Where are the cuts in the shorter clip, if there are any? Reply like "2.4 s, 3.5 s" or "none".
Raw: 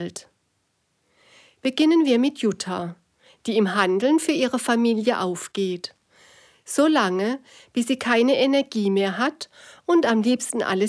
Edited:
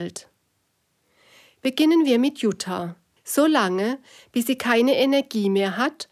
3.2 s